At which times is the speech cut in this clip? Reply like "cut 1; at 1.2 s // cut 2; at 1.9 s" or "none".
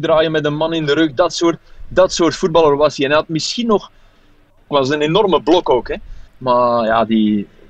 cut 1; at 4.7 s // cut 2; at 6.3 s